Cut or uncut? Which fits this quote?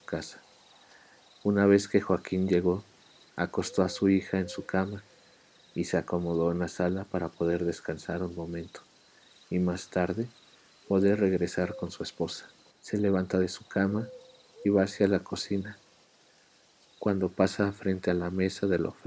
cut